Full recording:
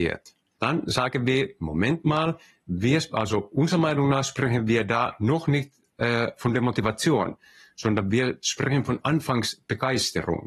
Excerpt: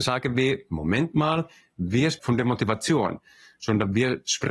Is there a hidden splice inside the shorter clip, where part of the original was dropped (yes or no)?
yes